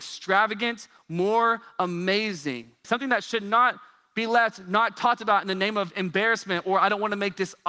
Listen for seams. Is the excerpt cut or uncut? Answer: cut